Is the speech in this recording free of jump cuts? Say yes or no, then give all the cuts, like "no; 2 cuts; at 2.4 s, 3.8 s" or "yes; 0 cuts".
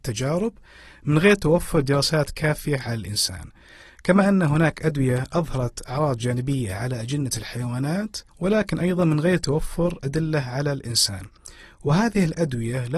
no; 1 cut; at 8.3 s